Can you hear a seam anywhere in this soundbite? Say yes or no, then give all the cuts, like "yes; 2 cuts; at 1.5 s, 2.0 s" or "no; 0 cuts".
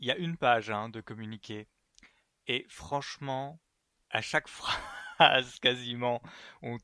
no; 0 cuts